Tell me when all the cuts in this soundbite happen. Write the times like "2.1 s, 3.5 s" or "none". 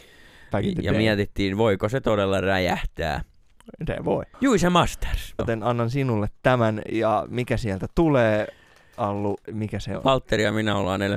4.3 s, 5.4 s, 9.4 s